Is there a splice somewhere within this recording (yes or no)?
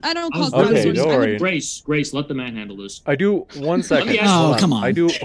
yes